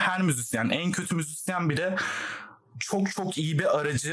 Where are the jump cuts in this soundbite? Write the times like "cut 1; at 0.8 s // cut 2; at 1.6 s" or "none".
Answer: none